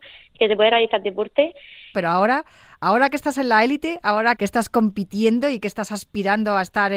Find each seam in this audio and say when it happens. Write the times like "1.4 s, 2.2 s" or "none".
1.9 s, 4.4 s